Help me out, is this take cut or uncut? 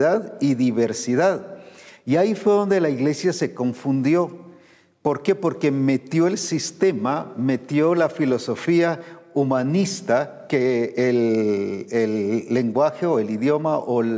uncut